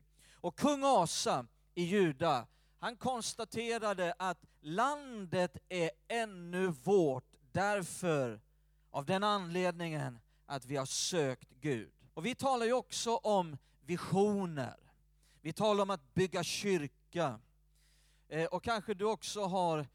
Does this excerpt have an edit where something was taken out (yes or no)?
yes